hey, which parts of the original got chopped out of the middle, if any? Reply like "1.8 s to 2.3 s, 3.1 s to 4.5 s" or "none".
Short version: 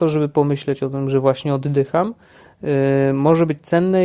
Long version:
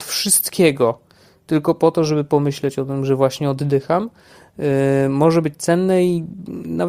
none